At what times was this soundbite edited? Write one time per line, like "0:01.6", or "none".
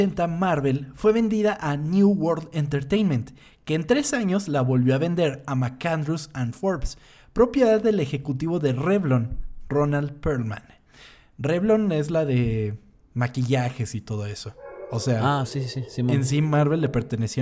none